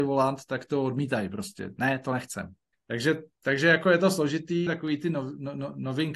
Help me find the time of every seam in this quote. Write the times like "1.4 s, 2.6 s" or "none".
2.7 s, 4.7 s